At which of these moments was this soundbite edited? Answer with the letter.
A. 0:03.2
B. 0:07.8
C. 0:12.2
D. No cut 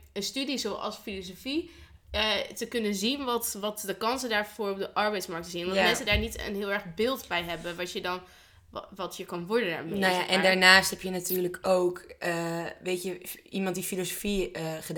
D